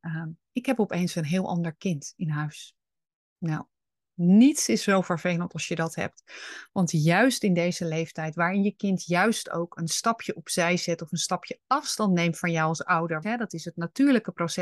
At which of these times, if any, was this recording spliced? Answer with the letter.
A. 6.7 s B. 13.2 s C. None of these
B